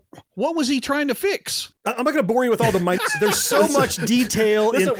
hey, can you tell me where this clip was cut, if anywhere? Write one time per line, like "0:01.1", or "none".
0:03.0